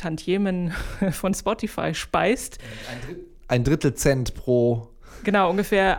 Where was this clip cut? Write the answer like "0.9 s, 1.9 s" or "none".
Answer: none